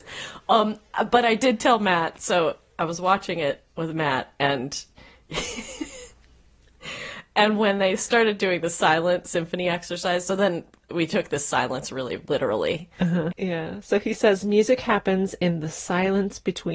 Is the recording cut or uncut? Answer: cut